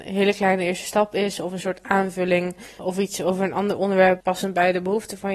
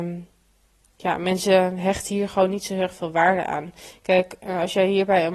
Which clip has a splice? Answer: first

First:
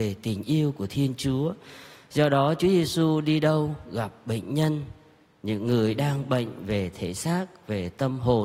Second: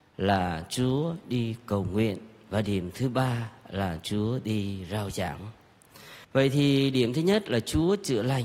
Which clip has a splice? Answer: second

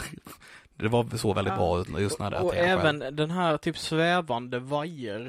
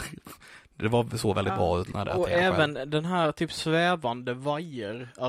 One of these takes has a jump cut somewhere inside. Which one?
second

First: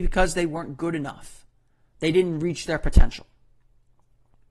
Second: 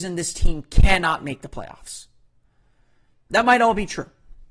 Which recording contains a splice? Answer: second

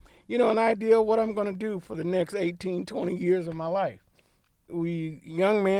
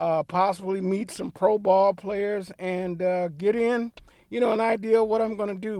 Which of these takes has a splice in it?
first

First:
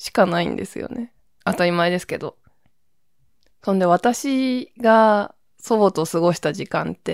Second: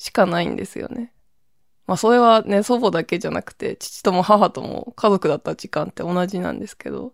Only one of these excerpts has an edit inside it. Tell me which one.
first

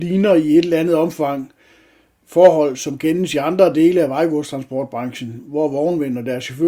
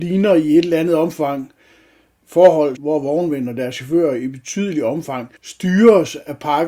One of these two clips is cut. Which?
second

